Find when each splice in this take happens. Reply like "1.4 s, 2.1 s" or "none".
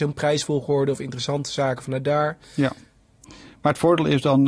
none